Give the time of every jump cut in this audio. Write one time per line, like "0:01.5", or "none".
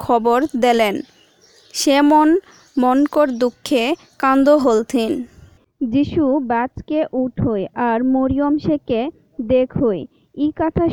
none